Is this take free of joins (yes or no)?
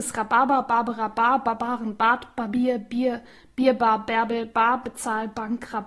yes